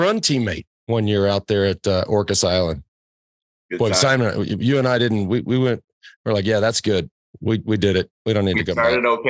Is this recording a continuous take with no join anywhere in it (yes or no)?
yes